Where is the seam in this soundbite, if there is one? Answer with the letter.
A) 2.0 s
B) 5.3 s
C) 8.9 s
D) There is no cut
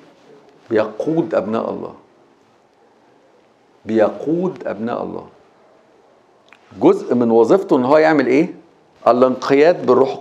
C